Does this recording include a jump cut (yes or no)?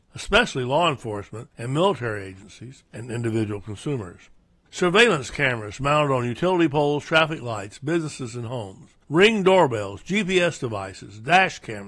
yes